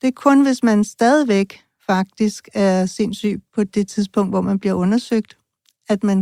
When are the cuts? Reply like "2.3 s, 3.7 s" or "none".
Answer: none